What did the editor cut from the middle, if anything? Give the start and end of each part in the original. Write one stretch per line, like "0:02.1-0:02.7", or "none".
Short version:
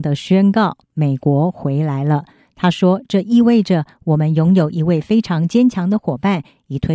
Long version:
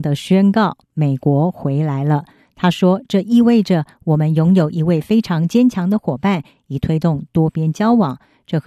none